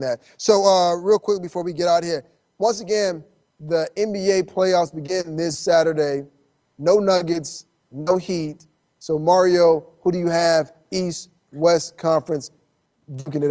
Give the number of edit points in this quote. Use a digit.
0